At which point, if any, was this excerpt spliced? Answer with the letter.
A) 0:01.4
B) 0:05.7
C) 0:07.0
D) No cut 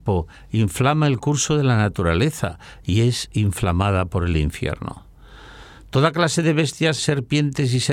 C